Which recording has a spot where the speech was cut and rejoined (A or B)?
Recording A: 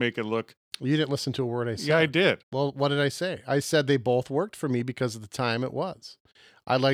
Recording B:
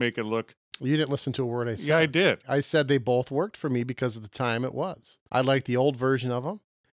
B